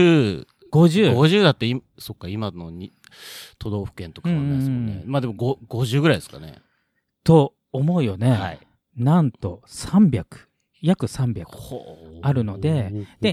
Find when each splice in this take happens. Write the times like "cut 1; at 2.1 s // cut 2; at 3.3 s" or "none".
cut 1; at 7.6 s